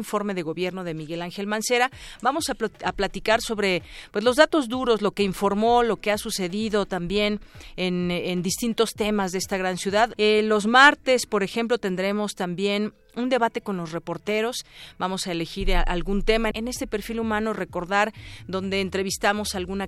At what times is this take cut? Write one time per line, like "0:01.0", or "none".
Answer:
0:10.1
0:16.5